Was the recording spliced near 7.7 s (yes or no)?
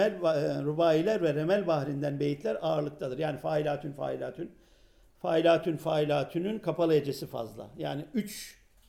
no